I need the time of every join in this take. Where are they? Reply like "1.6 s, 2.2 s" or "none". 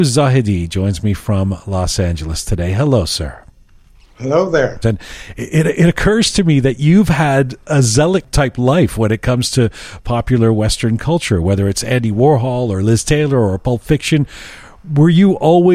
4.8 s